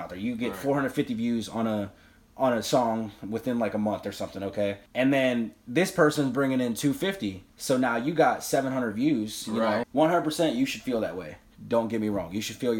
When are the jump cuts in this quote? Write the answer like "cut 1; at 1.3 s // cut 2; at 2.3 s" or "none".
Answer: cut 1; at 4.9 s // cut 2; at 7.5 s // cut 3; at 9.8 s

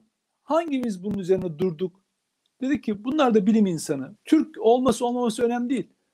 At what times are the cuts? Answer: cut 1; at 4.2 s

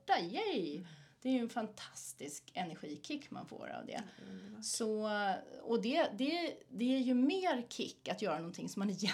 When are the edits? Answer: none

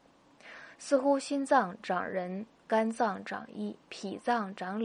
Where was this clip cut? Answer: cut 1; at 3.8 s

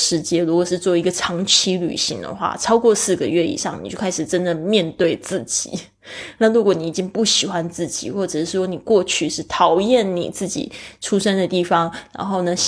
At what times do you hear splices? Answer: cut 1; at 6.4 s

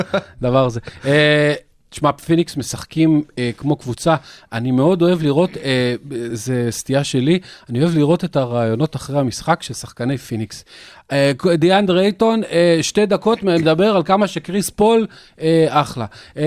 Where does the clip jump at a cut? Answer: cut 1; at 6.3 s

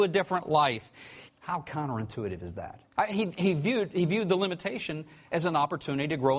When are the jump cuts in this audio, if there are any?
cut 1; at 1.3 s // cut 2; at 2.9 s

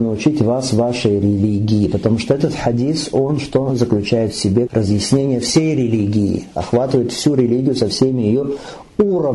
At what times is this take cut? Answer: cut 1; at 4.7 s

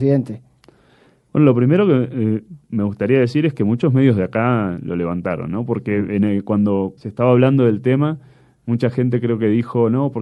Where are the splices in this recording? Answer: cut 1; at 2.6 s // cut 2; at 7.0 s

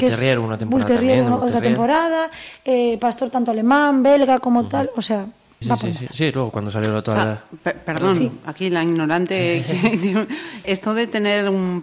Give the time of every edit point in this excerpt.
cut 1; at 5.6 s // cut 2; at 10.6 s

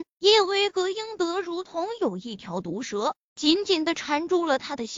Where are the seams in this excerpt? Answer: none

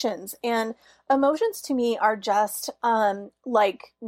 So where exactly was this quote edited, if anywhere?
none

